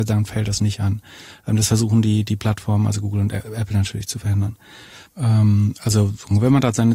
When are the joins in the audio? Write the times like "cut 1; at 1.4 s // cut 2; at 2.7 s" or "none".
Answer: cut 1; at 5.1 s